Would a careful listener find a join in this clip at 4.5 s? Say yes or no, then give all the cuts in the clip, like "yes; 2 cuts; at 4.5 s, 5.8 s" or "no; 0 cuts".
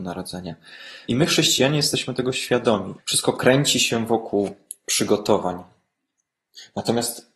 no; 2 cuts; at 1.1 s, 3.0 s